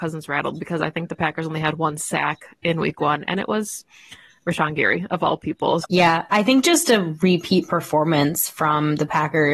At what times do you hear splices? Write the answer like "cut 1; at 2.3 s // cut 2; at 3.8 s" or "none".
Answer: cut 1; at 5.8 s